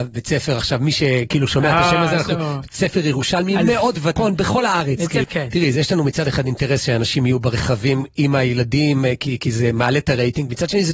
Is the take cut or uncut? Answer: cut